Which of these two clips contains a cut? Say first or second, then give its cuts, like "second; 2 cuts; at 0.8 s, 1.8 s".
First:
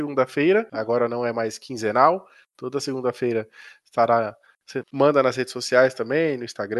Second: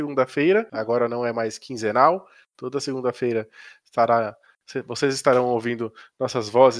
first; 1 cut; at 4.8 s